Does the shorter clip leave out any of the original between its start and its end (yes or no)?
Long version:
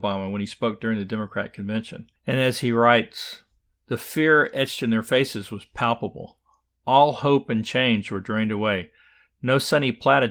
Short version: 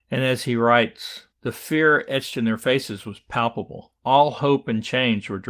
yes